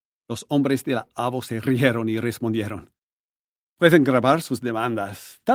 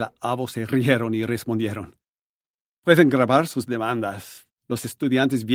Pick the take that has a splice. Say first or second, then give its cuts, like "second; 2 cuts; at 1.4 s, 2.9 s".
second; 1 cut; at 4.5 s